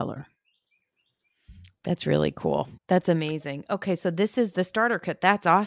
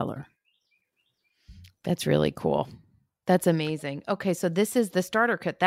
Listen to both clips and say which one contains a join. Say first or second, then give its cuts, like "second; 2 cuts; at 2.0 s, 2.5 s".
first; 1 cut; at 2.8 s